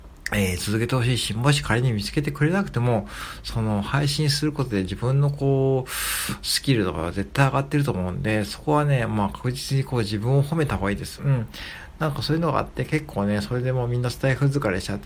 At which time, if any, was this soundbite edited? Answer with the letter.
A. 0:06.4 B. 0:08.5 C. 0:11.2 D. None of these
C